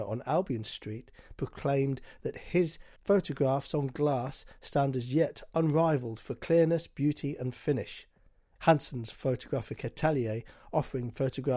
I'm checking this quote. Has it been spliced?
yes; 1 cut; at 8.6 s

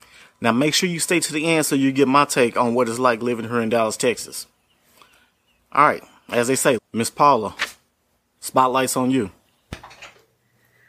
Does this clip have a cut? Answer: yes; 1 cut; at 6.8 s

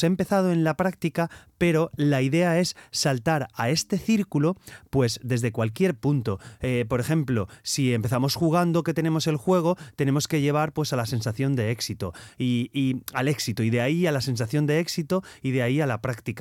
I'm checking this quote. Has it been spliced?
no; 0 cuts

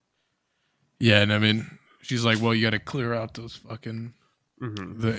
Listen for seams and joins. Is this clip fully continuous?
yes; 0 cuts

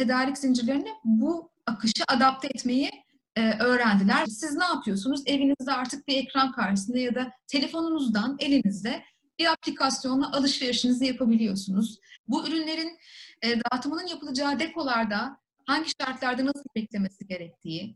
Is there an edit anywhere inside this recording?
yes; 2 cuts; at 4.2 s, 12.2 s

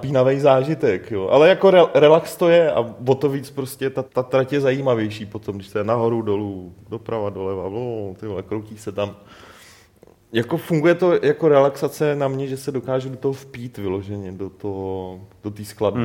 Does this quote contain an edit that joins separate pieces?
yes; 1 cut; at 4.0 s

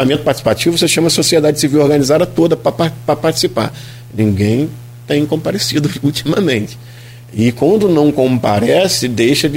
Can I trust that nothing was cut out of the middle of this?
yes; 0 cuts

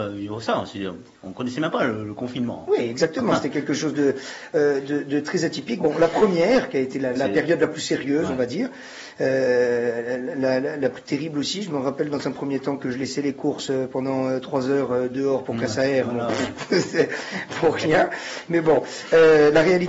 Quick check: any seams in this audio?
yes; 2 cuts; at 5.8 s, 7.2 s

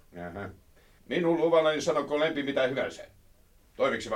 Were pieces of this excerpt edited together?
yes; 1 cut; at 1.0 s

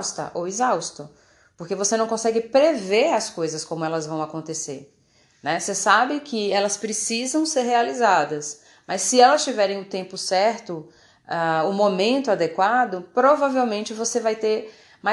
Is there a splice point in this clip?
no; 0 cuts

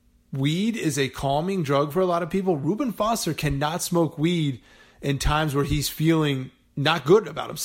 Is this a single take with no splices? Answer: yes; 0 cuts

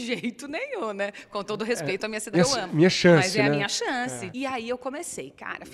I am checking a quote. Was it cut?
yes; 2 cuts; at 2.3 s, 4.3 s

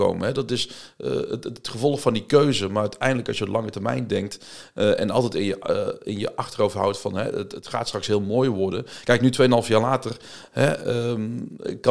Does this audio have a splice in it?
no; 0 cuts

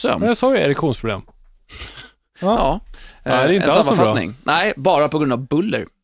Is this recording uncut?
yes; 0 cuts

